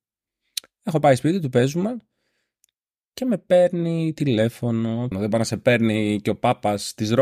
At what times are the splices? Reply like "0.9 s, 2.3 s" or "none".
5.1 s